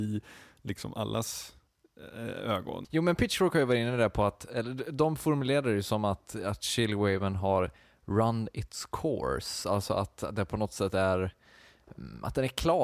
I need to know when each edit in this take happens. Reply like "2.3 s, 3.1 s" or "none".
2.8 s